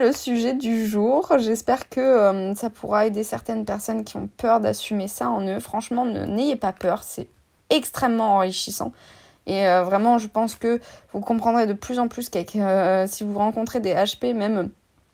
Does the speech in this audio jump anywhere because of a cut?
no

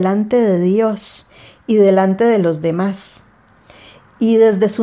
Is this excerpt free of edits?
yes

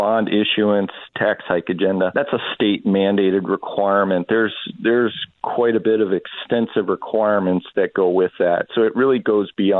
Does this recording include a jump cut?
yes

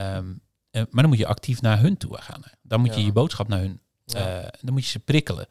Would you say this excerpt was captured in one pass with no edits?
yes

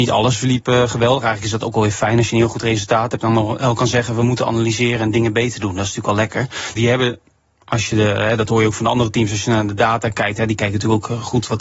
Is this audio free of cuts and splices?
no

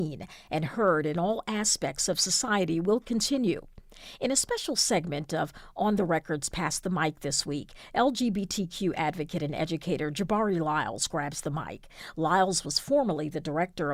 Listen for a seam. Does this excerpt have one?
no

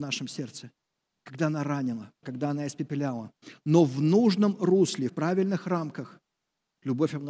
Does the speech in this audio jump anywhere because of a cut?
yes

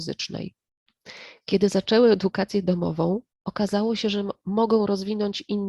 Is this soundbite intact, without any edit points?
no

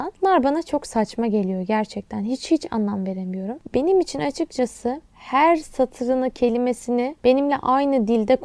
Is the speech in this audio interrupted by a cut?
no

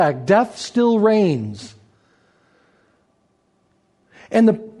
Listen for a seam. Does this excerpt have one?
no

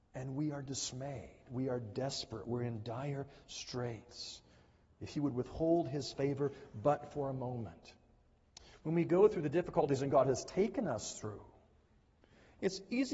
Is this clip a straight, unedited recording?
yes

